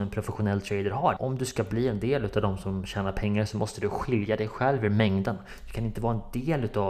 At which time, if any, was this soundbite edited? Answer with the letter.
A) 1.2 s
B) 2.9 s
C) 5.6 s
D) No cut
A